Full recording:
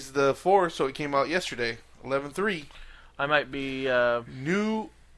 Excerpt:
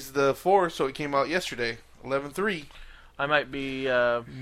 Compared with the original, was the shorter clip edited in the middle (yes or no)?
no